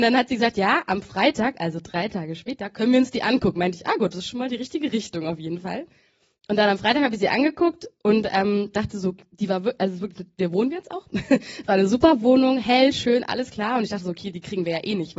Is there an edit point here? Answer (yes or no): no